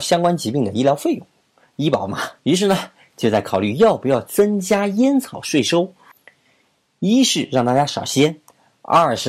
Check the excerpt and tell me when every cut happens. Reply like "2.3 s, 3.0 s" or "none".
2.4 s